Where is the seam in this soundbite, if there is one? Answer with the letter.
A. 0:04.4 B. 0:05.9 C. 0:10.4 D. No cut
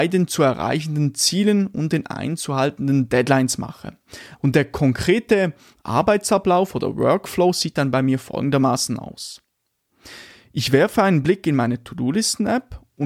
A